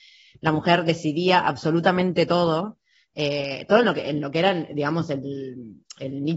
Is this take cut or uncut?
uncut